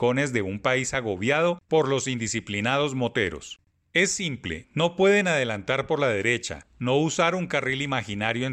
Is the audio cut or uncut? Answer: uncut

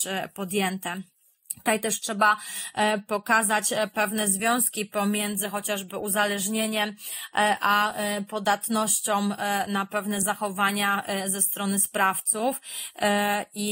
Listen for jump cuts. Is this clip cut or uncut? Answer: uncut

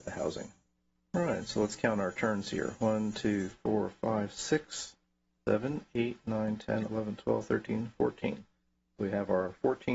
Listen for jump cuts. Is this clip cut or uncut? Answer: cut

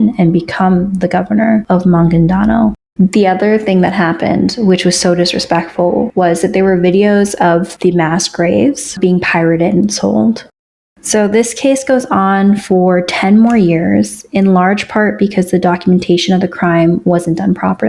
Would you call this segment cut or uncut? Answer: cut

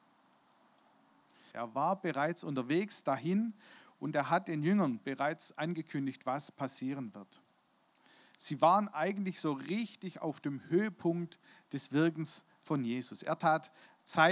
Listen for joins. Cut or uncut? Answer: cut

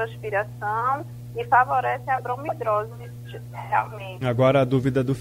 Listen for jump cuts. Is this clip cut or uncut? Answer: cut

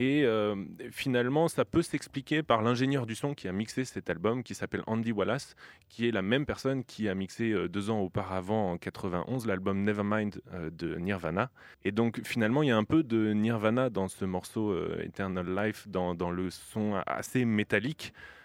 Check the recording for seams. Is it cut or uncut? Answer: cut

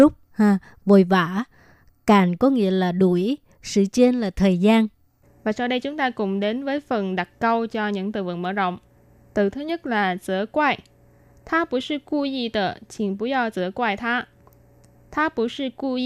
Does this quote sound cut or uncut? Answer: uncut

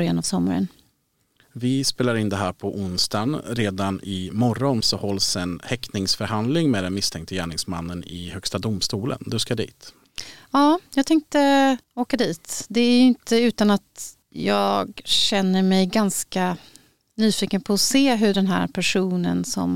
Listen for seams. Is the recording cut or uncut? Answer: cut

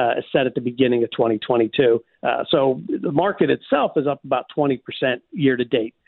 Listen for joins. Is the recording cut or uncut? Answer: cut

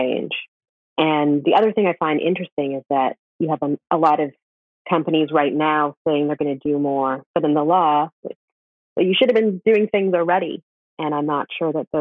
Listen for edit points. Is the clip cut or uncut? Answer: cut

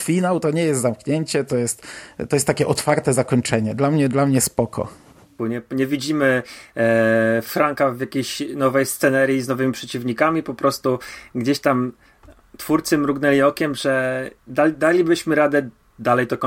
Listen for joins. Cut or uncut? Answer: cut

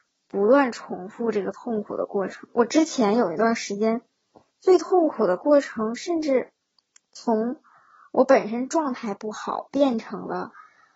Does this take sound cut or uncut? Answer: uncut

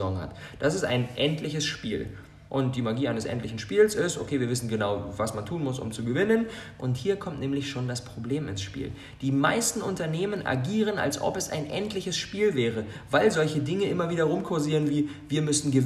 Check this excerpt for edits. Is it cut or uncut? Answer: cut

